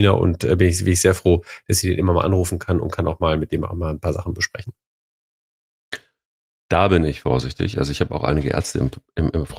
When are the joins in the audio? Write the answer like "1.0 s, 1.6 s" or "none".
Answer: none